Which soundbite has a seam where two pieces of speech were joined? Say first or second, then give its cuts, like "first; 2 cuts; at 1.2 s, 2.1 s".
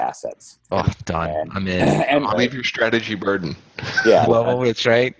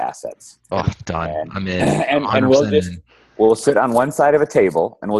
first; 2 cuts; at 2.3 s, 4.3 s